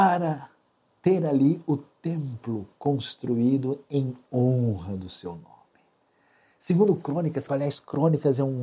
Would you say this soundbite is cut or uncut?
cut